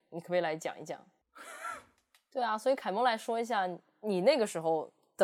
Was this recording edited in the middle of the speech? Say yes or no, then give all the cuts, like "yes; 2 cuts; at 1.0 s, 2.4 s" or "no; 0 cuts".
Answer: yes; 1 cut; at 1.2 s